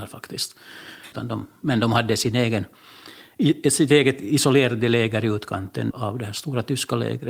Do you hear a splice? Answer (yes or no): yes